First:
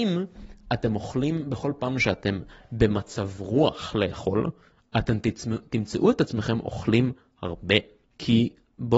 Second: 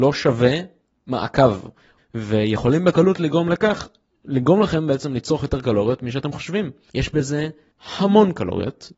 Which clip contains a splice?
second; 2 cuts; at 2.0 s, 6.9 s

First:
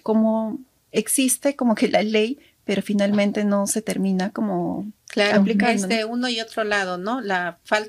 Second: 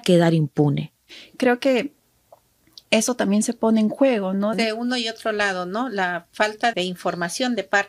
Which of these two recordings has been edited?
second; 2 cuts; at 4.5 s, 6.7 s

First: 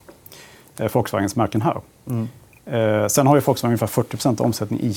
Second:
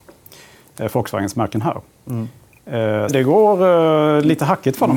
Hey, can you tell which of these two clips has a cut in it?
second; 1 cut; at 3.1 s

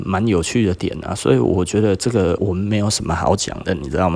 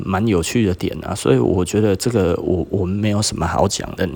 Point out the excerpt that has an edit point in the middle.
first; 1 cut; at 2.4 s

